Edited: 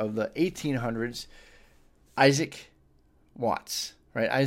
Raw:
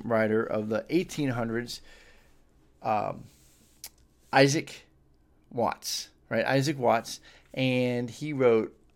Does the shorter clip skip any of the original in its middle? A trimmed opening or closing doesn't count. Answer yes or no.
yes